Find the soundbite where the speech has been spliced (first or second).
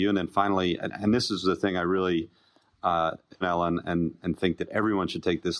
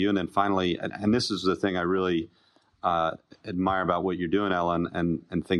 first